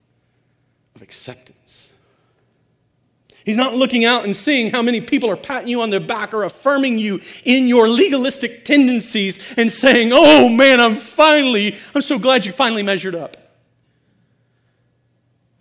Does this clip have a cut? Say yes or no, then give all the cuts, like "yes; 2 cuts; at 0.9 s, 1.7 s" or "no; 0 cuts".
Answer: no; 0 cuts